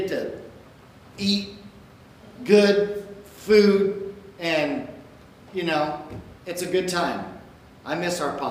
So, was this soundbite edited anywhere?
yes; 1 cut; at 6.4 s

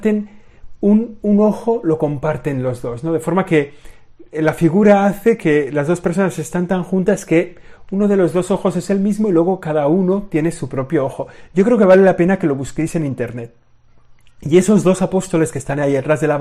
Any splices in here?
no; 0 cuts

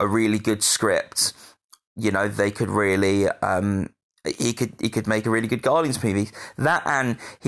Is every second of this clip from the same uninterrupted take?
yes; 0 cuts

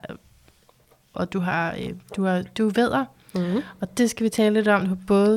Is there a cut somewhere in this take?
yes; 1 cut; at 1.1 s

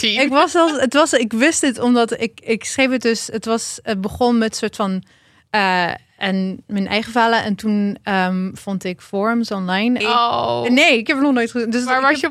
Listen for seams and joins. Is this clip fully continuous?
no; 1 cut; at 10.0 s

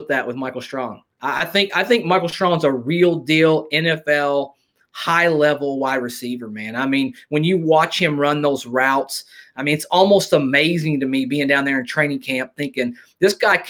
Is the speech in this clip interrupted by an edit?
no; 0 cuts

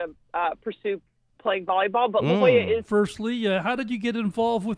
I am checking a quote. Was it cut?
yes; 1 cut; at 2.8 s

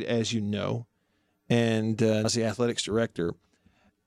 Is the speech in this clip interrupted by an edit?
yes; 1 cut; at 2.2 s

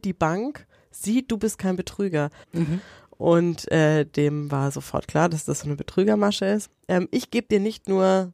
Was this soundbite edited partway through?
yes; 2 cuts; at 2.4 s, 6.7 s

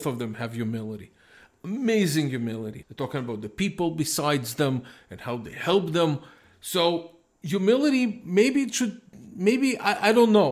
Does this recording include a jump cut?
yes; 1 cut; at 2.8 s

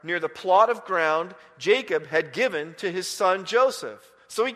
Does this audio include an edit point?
no; 0 cuts

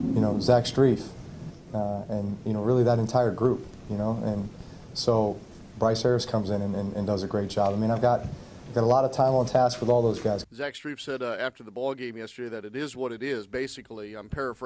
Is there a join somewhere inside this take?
yes; 2 cuts; at 5.7 s, 10.4 s

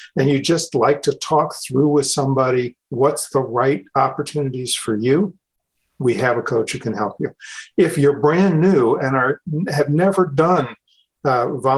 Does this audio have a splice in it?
no; 0 cuts

